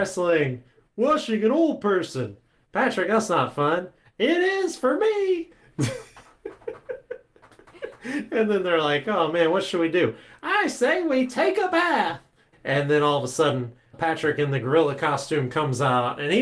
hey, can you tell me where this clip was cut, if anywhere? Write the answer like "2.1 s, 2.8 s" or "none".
12.5 s, 13.9 s